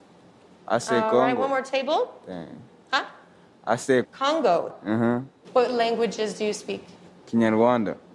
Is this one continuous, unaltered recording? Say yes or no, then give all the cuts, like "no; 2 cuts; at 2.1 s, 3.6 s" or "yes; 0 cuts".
no; 3 cuts; at 4.0 s, 5.4 s, 7.1 s